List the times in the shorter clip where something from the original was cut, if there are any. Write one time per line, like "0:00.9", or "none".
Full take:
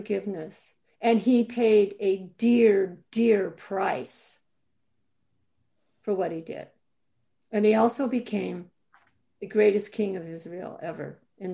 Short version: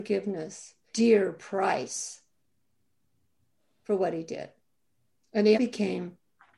0:00.9
0:05.5